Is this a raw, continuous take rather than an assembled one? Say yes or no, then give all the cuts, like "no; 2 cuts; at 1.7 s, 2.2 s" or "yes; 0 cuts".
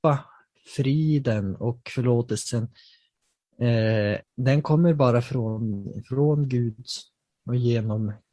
no; 1 cut; at 4.3 s